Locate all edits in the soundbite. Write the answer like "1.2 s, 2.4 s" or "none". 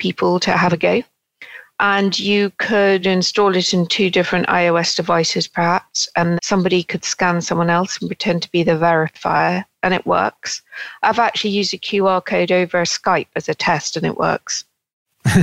6.4 s